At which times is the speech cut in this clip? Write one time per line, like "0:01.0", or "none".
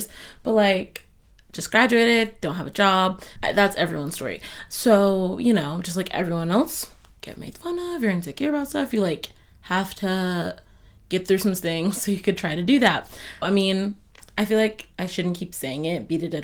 0:03.4
0:13.4